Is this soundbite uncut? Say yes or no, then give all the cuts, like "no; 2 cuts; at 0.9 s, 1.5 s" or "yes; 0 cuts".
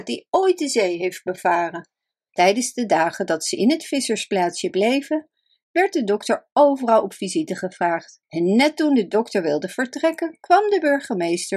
no; 2 cuts; at 2.3 s, 8.2 s